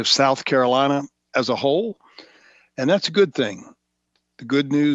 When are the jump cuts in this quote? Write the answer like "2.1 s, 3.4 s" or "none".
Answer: none